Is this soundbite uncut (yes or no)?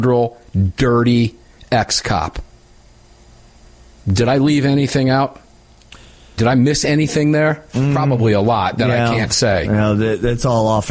no